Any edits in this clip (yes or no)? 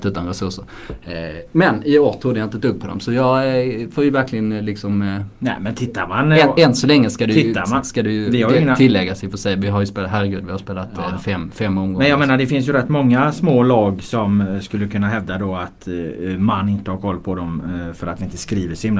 no